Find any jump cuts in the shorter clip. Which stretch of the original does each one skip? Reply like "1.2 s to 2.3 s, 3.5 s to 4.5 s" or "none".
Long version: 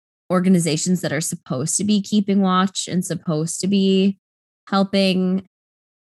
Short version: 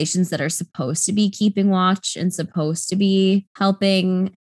4.2 s to 4.6 s